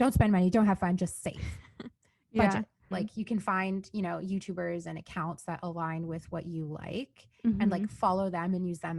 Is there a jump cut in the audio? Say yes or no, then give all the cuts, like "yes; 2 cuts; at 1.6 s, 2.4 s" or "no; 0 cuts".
yes; 1 cut; at 2.9 s